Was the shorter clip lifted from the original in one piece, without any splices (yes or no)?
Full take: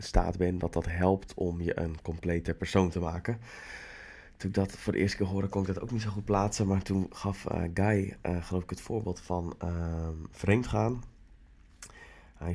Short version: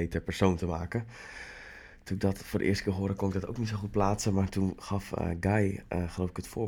yes